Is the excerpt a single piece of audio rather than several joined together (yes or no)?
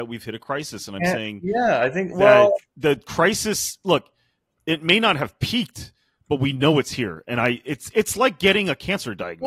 yes